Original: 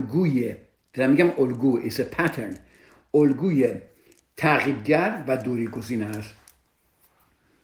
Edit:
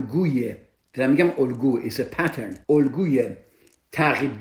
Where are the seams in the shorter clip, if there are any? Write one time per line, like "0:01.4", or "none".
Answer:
0:02.6